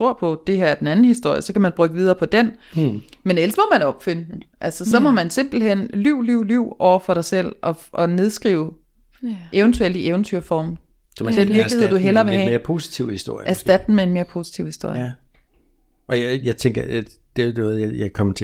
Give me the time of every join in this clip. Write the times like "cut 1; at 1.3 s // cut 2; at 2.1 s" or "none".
none